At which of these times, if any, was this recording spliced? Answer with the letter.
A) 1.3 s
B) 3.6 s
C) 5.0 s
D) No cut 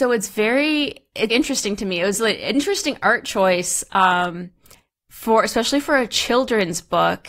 A